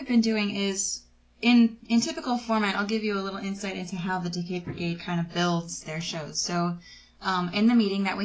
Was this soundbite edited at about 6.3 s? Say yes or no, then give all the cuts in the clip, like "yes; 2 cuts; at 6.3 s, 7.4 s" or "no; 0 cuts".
no; 0 cuts